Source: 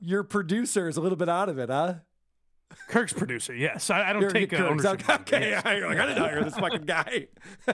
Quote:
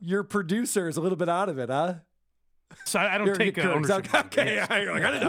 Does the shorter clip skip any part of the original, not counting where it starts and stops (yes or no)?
yes